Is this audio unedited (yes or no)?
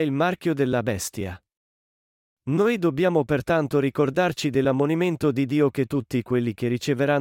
no